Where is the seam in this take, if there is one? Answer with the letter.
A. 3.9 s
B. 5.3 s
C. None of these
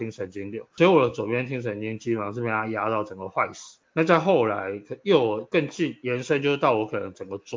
A